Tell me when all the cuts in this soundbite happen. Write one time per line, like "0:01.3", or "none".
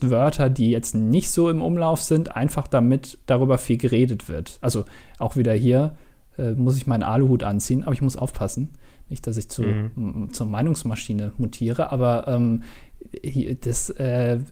none